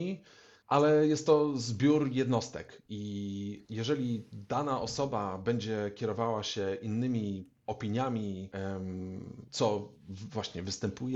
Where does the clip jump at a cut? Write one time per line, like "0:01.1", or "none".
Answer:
0:09.5